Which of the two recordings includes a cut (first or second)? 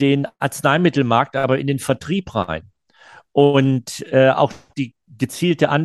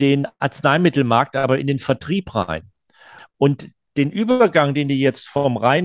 second